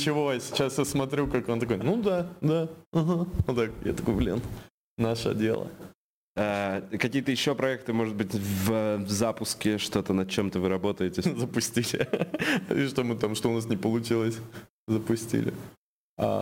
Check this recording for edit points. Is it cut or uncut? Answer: cut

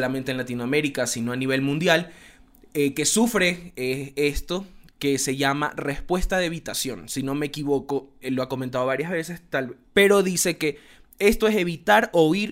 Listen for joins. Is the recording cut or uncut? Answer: cut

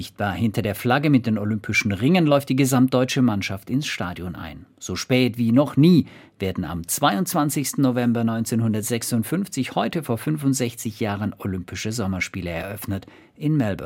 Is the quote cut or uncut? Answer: uncut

